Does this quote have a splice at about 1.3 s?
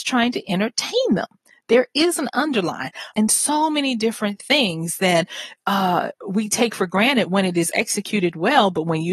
no; 1 cut; at 3.1 s

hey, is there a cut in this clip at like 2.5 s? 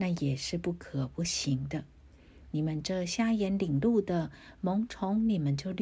no; 0 cuts

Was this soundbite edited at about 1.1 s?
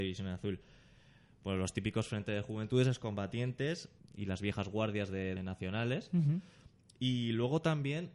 no; 2 cuts; at 4.0 s, 5.4 s

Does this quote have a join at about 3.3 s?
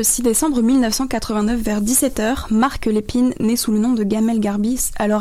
no; 0 cuts

